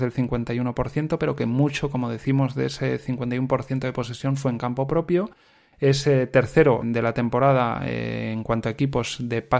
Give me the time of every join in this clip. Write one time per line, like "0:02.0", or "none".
0:06.8